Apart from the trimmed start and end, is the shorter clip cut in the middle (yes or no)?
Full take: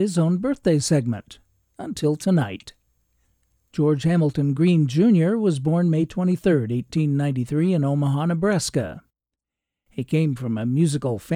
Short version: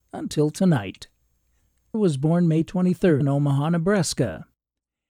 yes